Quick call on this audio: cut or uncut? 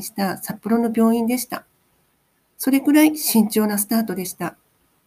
uncut